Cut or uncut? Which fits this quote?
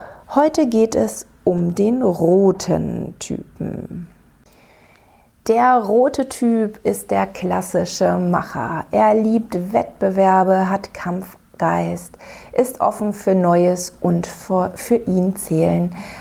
uncut